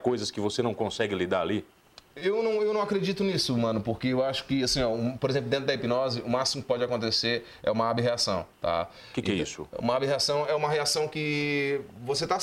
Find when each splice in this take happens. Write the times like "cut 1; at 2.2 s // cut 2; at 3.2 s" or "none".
none